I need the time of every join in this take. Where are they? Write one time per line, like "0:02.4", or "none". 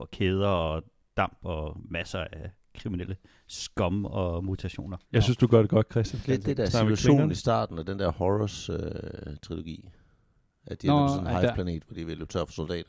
0:05.0
0:06.2